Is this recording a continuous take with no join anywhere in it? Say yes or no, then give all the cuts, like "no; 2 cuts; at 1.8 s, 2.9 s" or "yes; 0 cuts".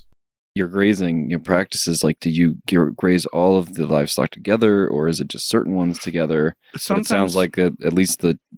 yes; 0 cuts